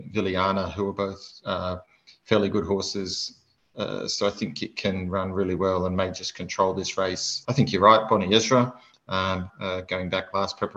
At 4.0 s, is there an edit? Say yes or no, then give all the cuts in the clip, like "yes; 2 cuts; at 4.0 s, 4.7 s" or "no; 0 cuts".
no; 2 cuts; at 7.4 s, 9.5 s